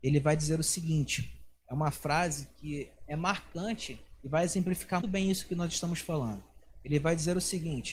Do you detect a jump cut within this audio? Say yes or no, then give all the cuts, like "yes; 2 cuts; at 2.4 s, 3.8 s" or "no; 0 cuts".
yes; 1 cut; at 5.0 s